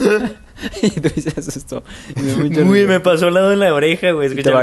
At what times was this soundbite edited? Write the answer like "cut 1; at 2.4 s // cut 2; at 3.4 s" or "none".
none

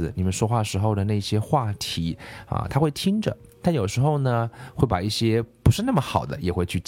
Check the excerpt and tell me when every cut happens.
none

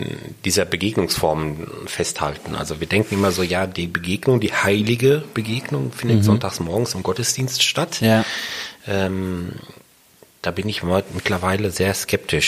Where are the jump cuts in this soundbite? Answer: none

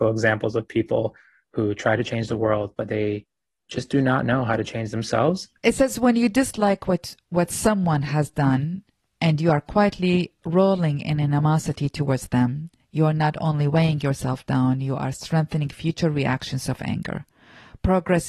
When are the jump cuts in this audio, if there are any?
cut 1; at 5.6 s

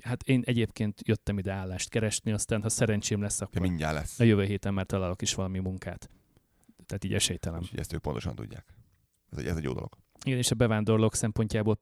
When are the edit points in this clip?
cut 1; at 6.8 s // cut 2; at 9.2 s

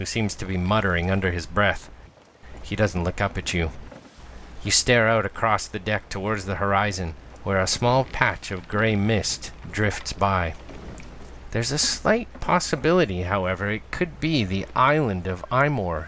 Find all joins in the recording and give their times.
cut 1; at 11.5 s

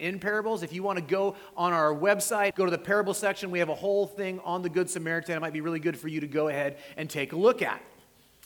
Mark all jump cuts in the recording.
cut 1; at 2.5 s

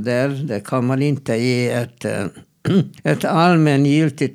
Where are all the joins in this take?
cut 1; at 3.0 s

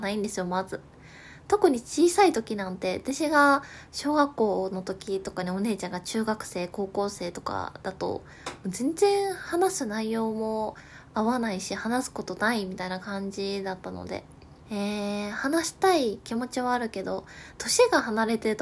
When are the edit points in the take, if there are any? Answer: cut 1; at 14.6 s // cut 2; at 17.6 s

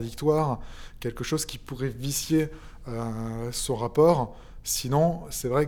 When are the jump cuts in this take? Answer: none

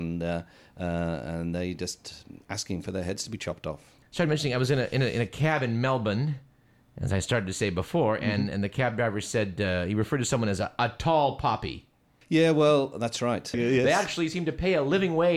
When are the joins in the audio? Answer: cut 1; at 4.0 s // cut 2; at 13.5 s

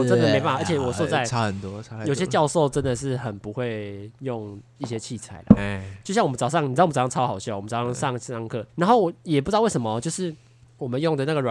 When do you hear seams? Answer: cut 1; at 8.7 s

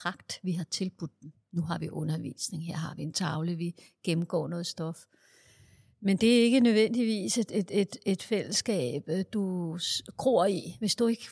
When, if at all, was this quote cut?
none

